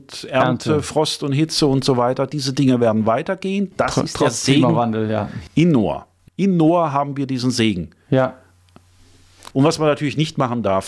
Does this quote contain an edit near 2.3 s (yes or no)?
no